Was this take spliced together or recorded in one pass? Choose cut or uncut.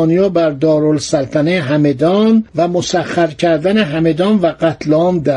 cut